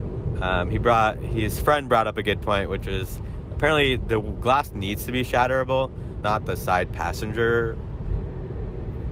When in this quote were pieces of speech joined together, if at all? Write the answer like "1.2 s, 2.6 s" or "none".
6.2 s